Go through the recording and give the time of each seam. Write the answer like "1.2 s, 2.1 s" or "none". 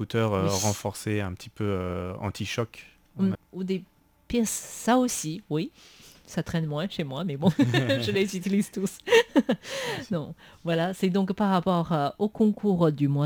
3.3 s

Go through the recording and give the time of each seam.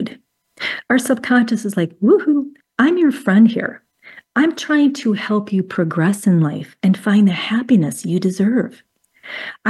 none

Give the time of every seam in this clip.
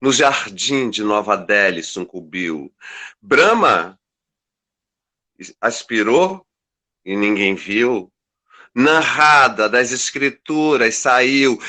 none

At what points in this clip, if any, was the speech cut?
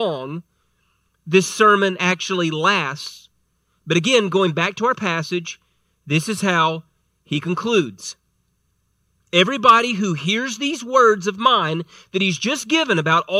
none

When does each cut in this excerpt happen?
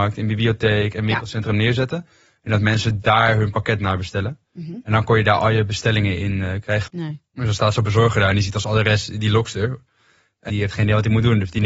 4.4 s, 6.9 s, 10.5 s

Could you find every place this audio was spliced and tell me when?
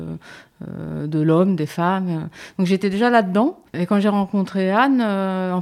3.7 s

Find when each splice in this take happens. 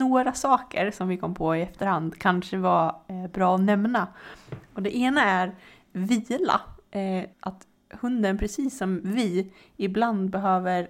7.3 s

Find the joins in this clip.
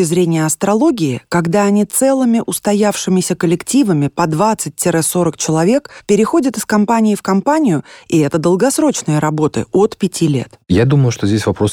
none

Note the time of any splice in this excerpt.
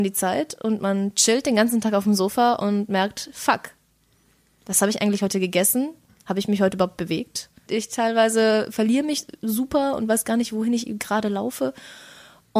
7.7 s

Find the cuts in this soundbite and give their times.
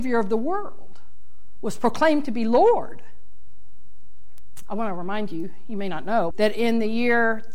6.3 s

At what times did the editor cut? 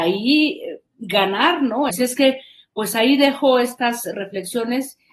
1.9 s

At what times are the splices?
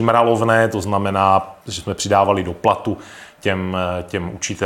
1.6 s

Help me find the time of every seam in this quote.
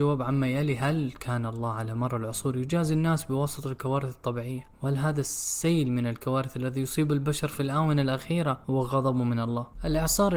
none

